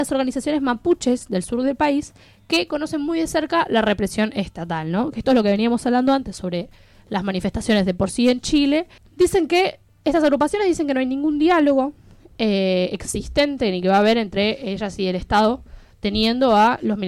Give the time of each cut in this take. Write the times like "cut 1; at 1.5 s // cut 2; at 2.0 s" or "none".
cut 1; at 9.0 s